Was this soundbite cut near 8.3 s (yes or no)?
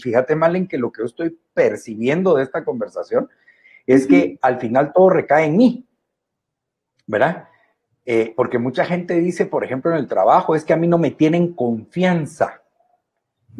yes